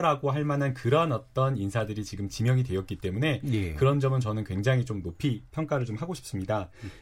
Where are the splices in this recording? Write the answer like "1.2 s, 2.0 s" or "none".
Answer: none